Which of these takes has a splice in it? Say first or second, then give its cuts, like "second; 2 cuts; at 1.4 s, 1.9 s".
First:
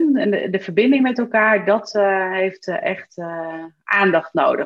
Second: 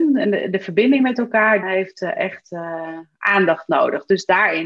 second; 1 cut; at 1.6 s